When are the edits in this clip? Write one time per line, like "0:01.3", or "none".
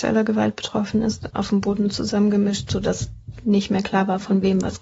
0:01.3